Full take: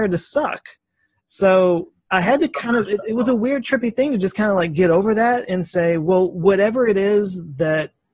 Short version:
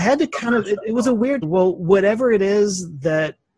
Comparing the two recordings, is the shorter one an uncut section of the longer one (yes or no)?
no